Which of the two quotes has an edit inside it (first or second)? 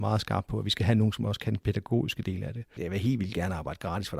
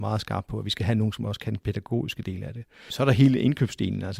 first